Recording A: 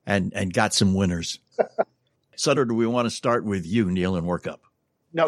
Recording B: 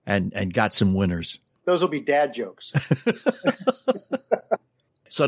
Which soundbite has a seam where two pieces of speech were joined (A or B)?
A